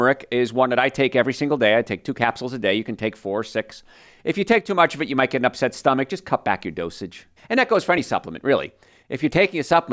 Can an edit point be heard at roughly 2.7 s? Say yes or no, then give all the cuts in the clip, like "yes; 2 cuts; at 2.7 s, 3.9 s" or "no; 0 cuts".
no; 1 cut; at 7.4 s